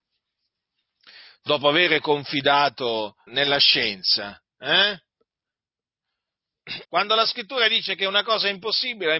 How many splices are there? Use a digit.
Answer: 2